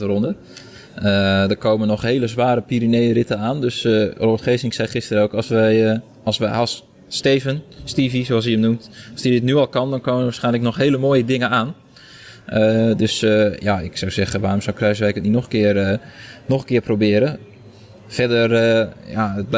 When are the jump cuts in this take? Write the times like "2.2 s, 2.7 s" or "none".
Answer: none